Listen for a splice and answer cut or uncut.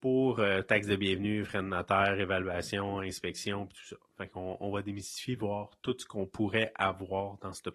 uncut